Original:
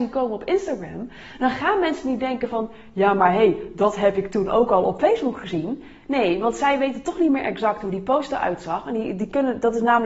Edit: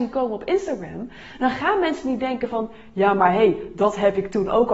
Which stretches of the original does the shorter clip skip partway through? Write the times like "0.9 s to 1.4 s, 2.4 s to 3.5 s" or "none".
none